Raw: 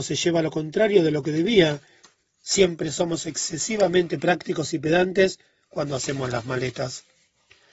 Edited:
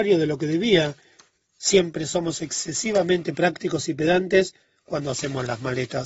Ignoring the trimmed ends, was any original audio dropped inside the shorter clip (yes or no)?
no